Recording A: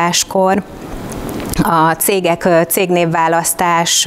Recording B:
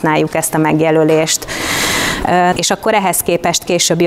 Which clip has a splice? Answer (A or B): B